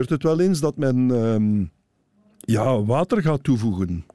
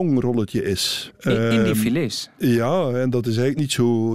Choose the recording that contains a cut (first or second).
second